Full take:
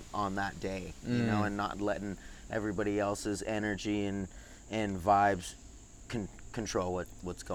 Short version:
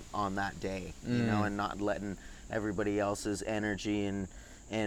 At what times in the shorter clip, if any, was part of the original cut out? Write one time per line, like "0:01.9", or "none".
none